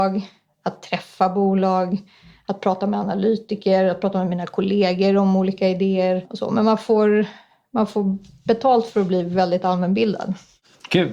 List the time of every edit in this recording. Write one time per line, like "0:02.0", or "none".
none